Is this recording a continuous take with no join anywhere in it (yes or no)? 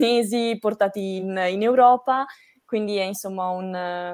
yes